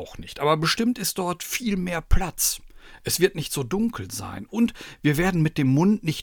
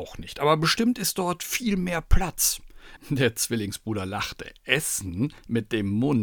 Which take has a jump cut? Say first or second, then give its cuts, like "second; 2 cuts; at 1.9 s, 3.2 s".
second; 1 cut; at 3.0 s